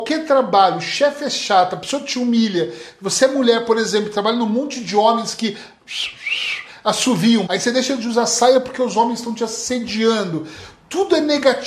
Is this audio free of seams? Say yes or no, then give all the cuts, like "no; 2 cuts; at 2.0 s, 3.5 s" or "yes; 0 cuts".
no; 1 cut; at 7.5 s